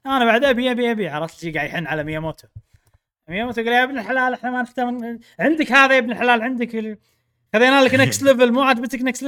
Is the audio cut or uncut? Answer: uncut